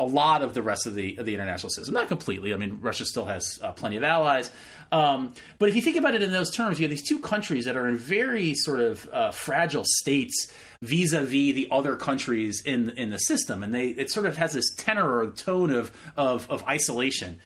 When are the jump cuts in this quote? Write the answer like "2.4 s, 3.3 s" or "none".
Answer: none